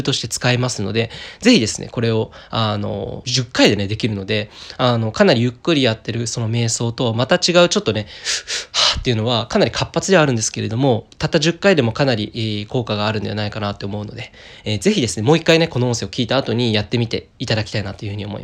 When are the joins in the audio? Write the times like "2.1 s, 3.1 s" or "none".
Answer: 3.2 s